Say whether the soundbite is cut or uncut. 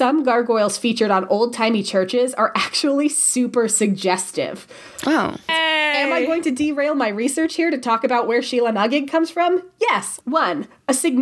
cut